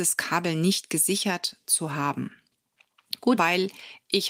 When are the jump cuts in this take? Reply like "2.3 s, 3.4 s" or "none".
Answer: 3.4 s